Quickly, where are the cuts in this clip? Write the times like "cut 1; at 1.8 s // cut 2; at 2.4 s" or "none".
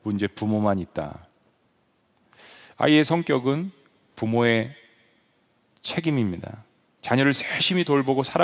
none